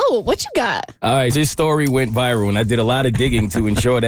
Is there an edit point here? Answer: yes; 1 cut; at 1.3 s

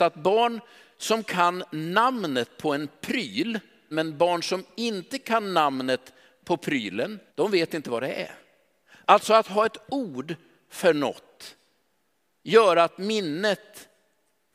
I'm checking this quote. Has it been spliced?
yes; 2 cuts; at 3.9 s, 7.3 s

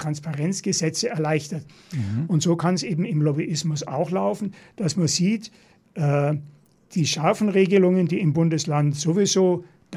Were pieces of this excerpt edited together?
no; 0 cuts

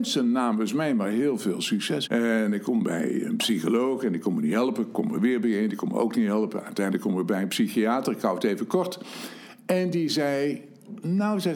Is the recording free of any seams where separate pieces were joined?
no; 1 cut; at 2.1 s

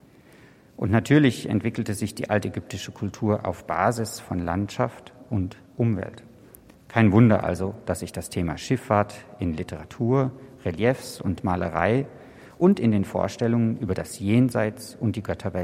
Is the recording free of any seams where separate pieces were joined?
yes; 0 cuts

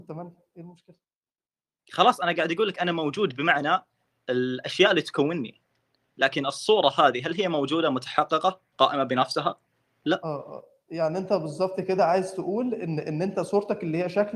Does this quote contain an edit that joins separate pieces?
no; 0 cuts

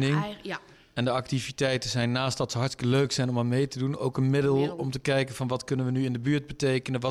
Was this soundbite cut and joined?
no; 0 cuts

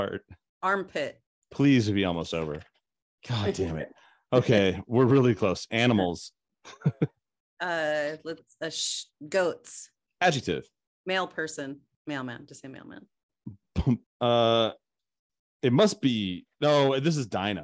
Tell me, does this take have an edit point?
yes; 2 cuts; at 10.9 s, 14.0 s

